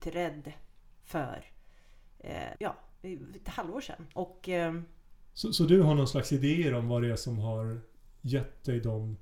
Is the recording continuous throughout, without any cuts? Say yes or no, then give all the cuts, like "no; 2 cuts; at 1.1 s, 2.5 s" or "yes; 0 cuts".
no; 2 cuts; at 2.5 s, 4.1 s